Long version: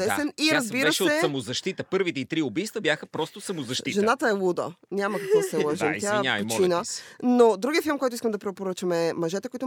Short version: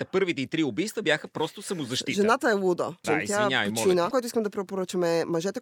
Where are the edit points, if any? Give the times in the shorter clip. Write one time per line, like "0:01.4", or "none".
0:03.0
0:04.1